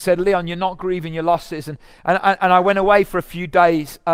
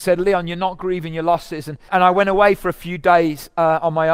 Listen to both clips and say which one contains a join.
second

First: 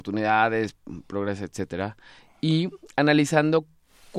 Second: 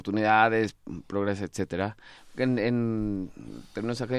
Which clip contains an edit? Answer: second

